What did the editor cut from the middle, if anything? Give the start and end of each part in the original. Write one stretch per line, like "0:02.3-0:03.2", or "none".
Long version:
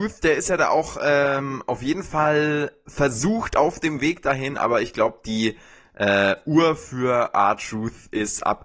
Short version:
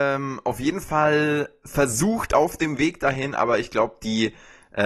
none